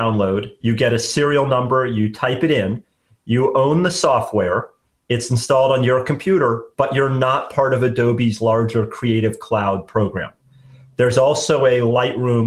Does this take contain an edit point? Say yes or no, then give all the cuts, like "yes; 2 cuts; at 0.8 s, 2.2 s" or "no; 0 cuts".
no; 0 cuts